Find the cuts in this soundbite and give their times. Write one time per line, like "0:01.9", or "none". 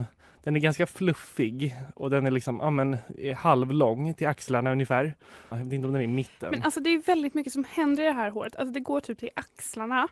0:05.5